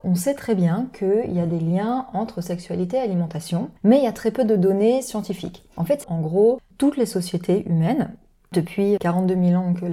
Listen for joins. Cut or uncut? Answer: cut